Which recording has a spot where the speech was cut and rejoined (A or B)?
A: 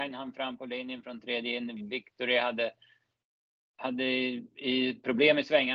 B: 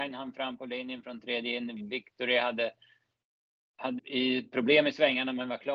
B